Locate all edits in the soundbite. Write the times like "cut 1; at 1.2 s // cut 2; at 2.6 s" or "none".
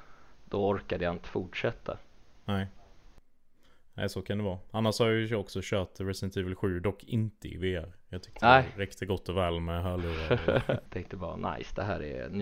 cut 1; at 10.9 s